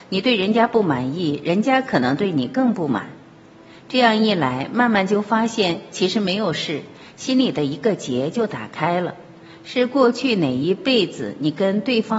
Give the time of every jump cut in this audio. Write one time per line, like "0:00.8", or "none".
none